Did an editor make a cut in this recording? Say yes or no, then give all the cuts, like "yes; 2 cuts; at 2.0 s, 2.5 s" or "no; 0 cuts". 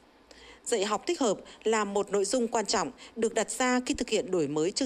no; 0 cuts